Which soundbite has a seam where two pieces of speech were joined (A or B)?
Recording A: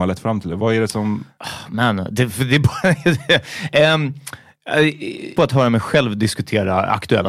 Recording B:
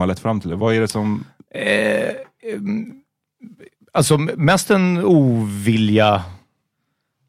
A